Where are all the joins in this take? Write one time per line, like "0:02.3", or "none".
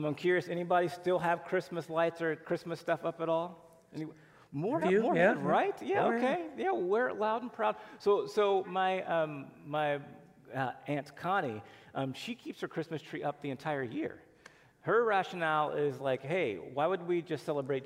0:04.8
0:08.6